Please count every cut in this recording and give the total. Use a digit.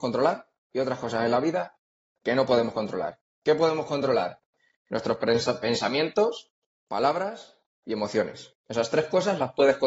1